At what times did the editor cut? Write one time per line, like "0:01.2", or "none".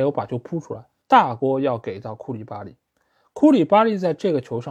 0:01.0

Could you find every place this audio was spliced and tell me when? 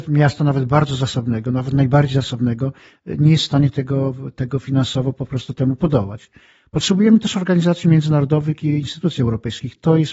none

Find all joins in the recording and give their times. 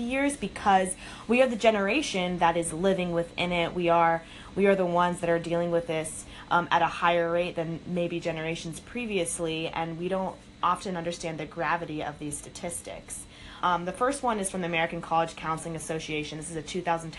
0:13.6

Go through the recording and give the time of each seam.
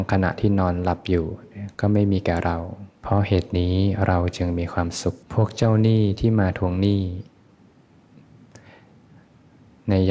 0:03.0
0:05.2

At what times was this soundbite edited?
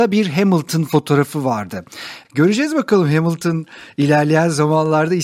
0:02.2

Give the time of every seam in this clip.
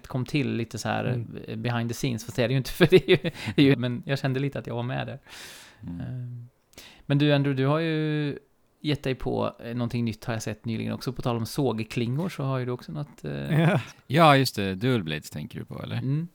0:03.7
0:13.9

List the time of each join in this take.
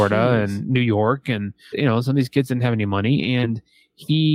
0:01.7

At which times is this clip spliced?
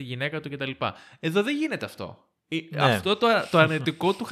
0:02.4

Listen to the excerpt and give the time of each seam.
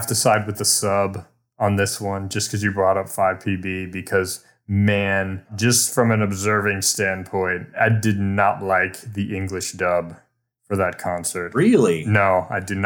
none

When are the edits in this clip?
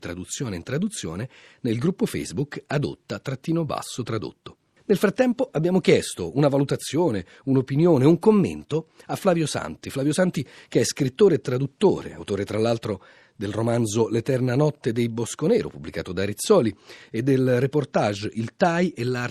none

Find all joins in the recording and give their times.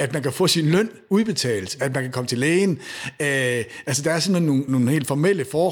0:04.7

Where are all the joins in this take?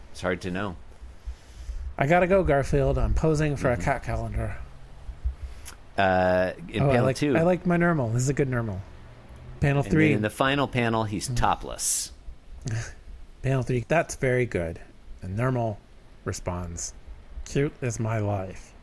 0:09.6
0:13.8

